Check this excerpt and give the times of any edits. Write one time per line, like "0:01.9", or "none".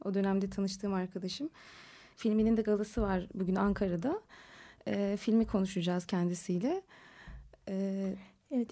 0:02.1